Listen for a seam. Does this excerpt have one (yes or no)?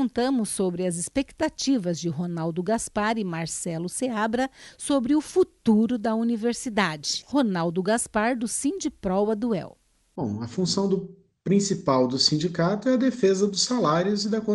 yes